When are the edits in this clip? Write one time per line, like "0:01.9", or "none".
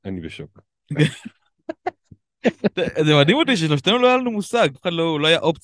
0:04.7

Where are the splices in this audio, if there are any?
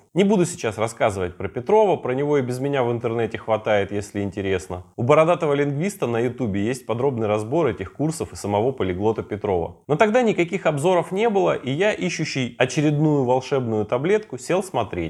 none

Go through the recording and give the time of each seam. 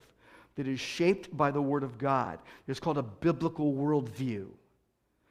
none

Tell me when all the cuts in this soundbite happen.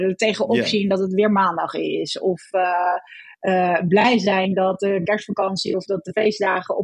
none

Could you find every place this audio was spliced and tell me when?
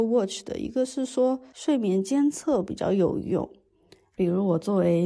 0:04.1

